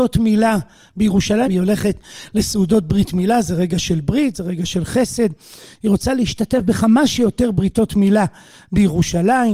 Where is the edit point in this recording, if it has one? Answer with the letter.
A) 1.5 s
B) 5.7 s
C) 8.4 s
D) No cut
A